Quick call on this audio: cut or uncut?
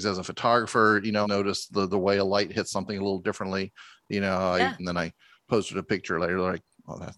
cut